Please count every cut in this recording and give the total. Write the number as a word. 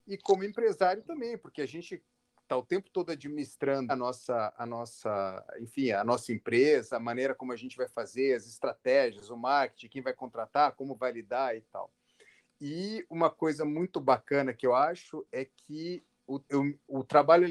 two